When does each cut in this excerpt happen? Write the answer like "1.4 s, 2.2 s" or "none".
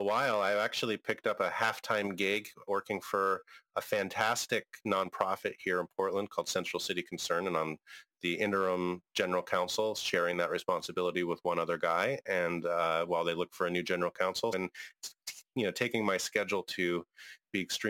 14.5 s